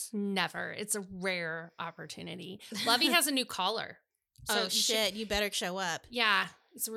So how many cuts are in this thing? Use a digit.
0